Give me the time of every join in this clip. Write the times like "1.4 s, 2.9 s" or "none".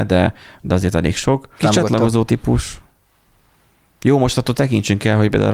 1.6 s